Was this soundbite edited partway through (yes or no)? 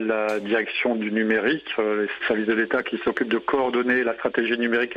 yes